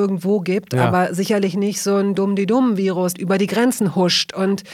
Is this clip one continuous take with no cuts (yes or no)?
no